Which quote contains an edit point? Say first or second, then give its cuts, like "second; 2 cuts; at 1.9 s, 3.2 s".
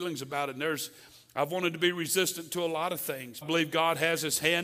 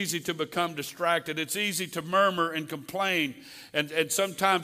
first; 1 cut; at 3.4 s